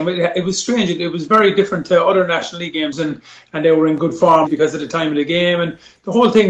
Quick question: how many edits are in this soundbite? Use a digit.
2